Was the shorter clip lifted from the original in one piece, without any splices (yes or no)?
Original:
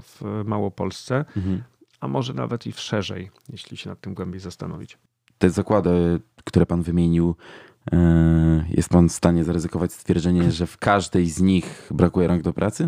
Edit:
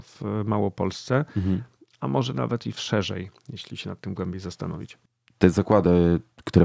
yes